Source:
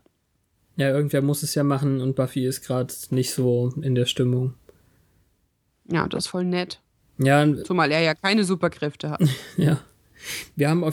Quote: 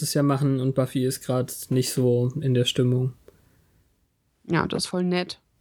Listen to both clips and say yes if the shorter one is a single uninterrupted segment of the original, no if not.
yes